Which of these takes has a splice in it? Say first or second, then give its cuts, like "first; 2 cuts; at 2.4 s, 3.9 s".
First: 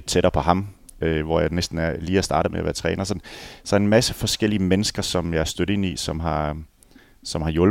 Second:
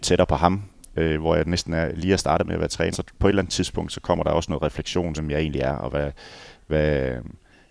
second; 2 cuts; at 2.9 s, 5.1 s